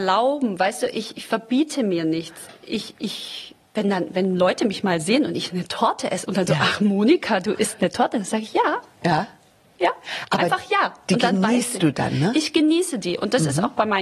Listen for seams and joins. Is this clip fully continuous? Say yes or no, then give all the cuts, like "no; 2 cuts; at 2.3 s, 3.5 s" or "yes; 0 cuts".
yes; 0 cuts